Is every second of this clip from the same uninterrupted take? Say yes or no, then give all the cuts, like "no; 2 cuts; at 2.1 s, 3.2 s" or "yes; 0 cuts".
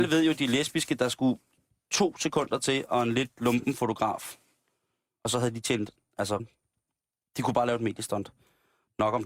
no; 1 cut; at 6.4 s